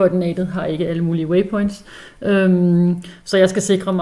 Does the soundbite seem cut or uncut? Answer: uncut